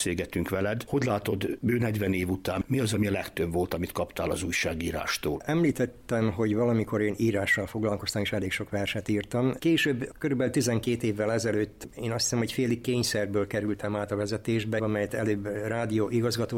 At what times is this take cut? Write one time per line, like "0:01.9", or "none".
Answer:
0:09.6
0:14.8